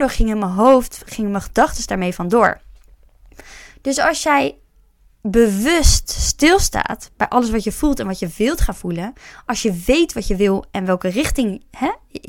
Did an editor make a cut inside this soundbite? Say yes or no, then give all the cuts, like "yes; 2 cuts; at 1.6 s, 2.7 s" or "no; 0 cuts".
no; 0 cuts